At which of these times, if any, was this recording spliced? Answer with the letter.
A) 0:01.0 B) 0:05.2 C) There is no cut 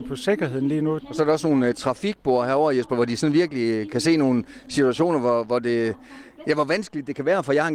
A